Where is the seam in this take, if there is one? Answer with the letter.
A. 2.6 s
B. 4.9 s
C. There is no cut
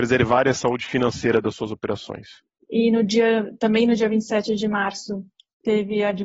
A